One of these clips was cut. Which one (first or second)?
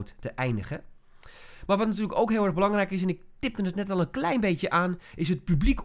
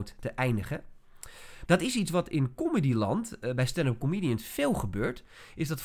second